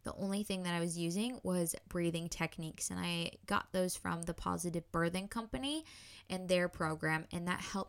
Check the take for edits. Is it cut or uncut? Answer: uncut